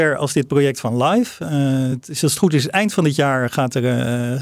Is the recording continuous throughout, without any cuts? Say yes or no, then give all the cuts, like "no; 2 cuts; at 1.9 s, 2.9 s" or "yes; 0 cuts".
yes; 0 cuts